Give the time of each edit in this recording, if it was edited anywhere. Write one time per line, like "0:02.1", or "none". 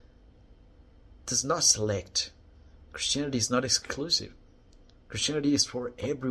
none